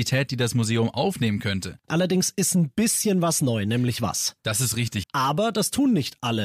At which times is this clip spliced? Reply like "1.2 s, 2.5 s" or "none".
1.8 s, 5.0 s